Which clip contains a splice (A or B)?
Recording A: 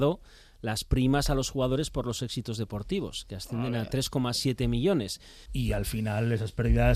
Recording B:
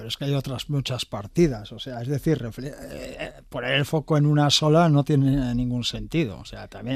A